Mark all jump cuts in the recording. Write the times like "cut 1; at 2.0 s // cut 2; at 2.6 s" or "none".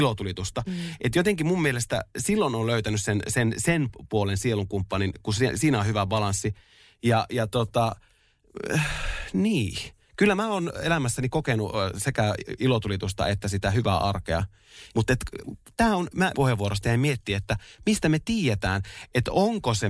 cut 1; at 14.9 s // cut 2; at 16.3 s